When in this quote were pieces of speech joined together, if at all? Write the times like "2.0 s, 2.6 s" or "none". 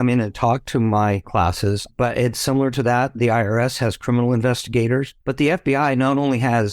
5.2 s